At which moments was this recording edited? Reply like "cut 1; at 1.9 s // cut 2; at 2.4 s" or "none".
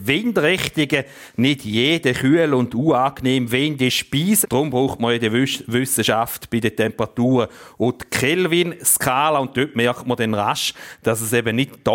cut 1; at 4.4 s